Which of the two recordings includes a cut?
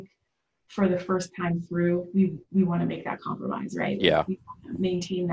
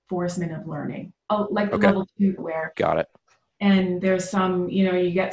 second; 1 cut; at 2.4 s

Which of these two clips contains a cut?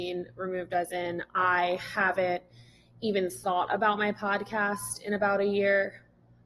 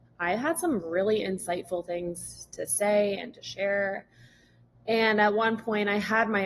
second; 1 cut; at 4.7 s

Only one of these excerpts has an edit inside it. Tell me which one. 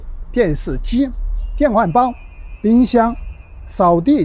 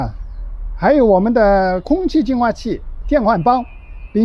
second; 1 cut; at 3.0 s

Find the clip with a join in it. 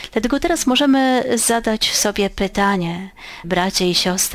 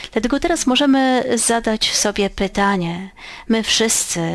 first; 1 cut; at 3.4 s

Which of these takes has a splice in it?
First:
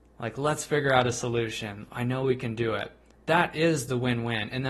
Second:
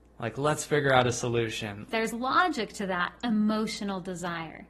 second; 1 cut; at 1.9 s

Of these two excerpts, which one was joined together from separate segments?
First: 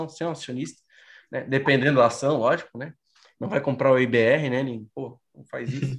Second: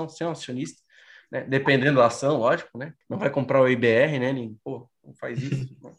second; 1 cut; at 3.0 s

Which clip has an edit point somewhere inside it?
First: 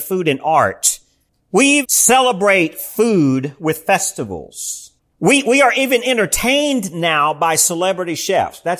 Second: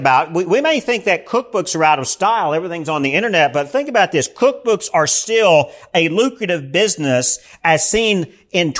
first; 1 cut; at 1.8 s

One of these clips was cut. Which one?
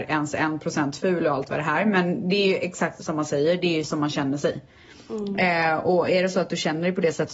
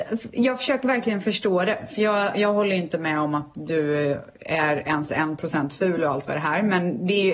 first; 1 cut; at 3.0 s

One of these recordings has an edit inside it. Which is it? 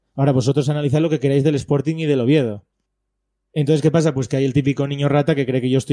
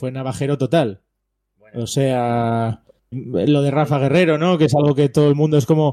second; 1 cut; at 3.1 s

